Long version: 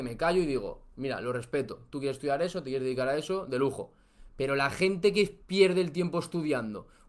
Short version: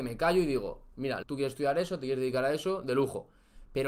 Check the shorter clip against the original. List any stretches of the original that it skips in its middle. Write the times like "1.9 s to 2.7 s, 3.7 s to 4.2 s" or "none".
1.2 s to 1.9 s